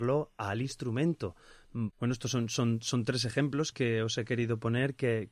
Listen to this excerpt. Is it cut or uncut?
cut